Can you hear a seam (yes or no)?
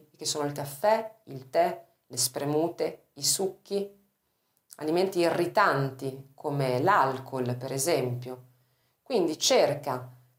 no